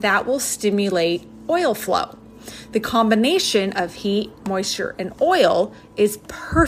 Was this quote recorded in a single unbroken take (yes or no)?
yes